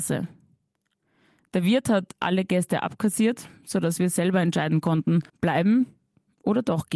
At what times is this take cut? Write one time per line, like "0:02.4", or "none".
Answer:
0:05.3